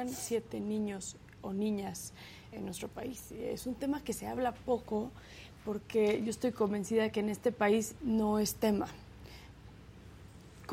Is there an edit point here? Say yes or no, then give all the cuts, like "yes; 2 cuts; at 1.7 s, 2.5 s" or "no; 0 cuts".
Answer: yes; 2 cuts; at 2.5 s, 8.0 s